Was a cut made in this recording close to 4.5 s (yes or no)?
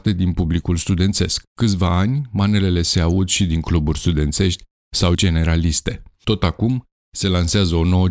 no